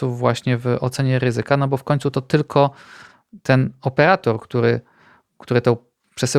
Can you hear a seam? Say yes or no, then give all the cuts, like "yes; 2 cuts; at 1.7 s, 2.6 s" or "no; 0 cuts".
no; 0 cuts